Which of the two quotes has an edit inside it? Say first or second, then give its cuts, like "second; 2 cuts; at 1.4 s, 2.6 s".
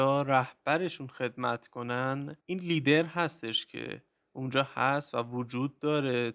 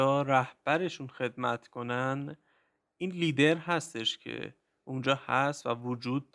first; 1 cut; at 2.4 s